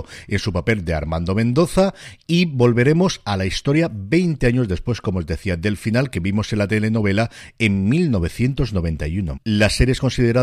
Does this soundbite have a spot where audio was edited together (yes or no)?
yes